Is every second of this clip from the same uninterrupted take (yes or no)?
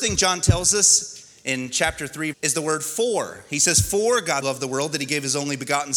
no